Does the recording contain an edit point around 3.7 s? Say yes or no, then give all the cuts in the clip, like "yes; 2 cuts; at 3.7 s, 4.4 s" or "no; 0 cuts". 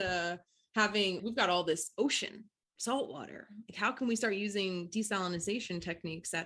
no; 1 cut; at 1.2 s